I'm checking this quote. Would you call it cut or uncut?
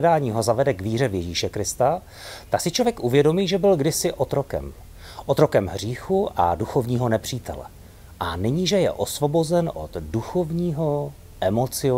uncut